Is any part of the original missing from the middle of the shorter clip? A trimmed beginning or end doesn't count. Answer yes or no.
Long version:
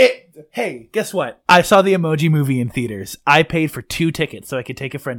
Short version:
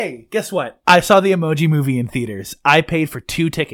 no